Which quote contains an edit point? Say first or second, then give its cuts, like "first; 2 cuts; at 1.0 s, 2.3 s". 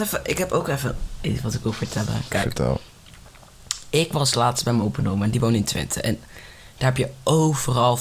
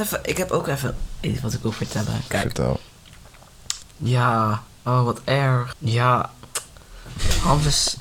second; 2 cuts; at 3.8 s, 5.7 s